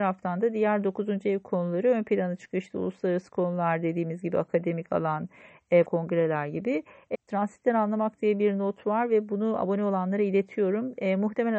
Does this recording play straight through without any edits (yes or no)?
no